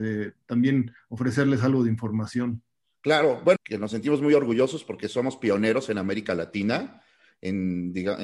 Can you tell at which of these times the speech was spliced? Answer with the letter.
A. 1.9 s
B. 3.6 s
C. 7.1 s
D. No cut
B